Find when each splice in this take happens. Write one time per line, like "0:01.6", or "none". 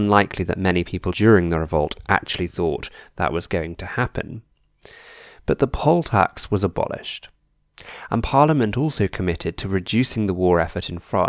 0:01.1